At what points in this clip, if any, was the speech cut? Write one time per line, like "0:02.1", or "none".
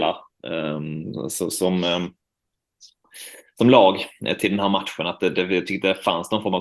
none